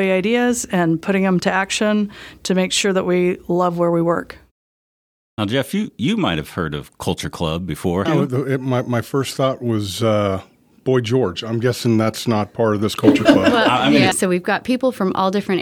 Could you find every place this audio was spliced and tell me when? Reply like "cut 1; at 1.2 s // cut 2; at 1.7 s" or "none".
cut 1; at 8.1 s // cut 2; at 14.1 s

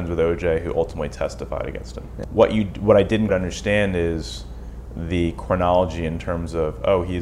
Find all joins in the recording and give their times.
cut 1; at 2.2 s // cut 2; at 3.3 s

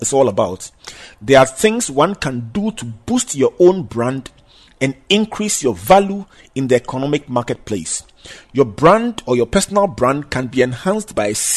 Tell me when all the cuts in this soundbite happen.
none

